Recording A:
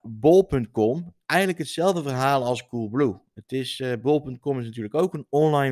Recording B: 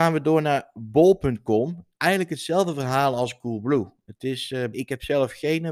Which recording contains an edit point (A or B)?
B